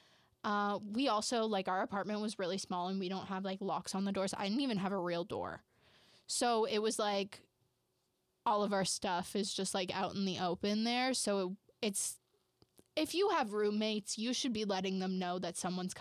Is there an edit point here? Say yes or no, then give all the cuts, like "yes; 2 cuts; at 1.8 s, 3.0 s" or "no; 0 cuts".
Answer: no; 0 cuts